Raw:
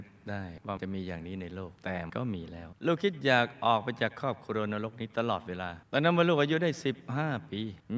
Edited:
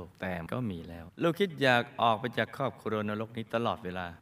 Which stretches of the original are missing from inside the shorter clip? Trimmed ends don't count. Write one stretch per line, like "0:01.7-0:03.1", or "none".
none